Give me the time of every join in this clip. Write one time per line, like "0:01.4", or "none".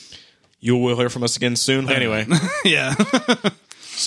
0:01.9